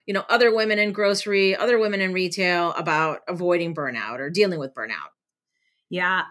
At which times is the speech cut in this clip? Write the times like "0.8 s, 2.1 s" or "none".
none